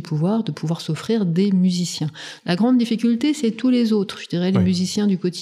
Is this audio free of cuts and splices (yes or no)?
no